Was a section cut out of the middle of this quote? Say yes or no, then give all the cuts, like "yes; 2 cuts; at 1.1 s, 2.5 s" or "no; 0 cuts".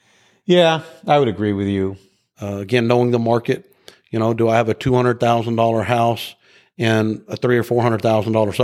yes; 1 cut; at 2.3 s